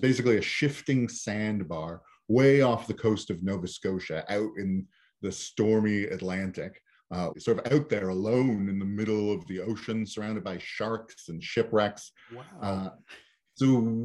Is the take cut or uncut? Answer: cut